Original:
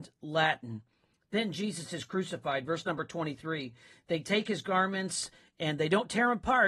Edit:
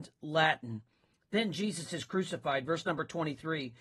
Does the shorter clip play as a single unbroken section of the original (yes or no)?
yes